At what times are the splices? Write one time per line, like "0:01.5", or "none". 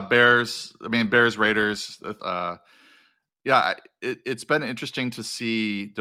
0:02.2